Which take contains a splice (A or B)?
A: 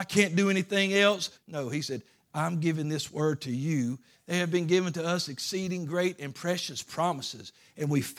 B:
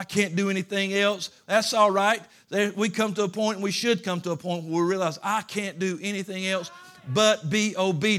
A